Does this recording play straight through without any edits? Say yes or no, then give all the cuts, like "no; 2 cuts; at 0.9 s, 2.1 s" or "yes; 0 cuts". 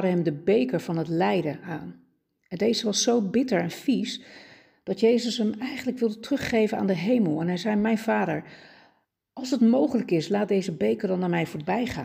yes; 0 cuts